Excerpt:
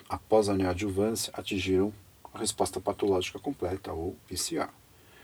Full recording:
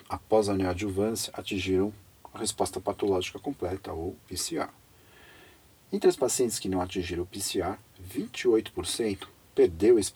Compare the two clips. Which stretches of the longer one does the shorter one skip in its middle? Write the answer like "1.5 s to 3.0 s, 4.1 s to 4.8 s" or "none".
none